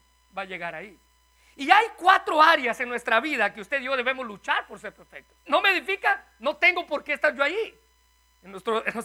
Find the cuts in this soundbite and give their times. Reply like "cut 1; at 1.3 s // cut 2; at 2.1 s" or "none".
cut 1; at 5.5 s